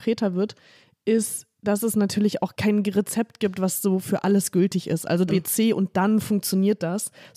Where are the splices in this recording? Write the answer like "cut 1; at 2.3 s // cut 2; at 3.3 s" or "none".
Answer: cut 1; at 5.3 s